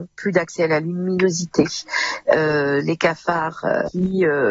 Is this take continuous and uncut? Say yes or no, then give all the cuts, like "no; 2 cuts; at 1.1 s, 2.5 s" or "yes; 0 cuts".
yes; 0 cuts